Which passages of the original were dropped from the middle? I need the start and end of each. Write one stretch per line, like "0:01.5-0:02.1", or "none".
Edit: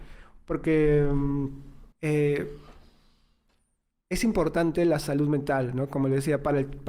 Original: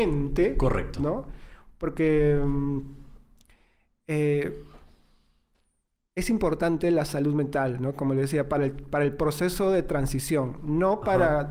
0:03.2-0:04.0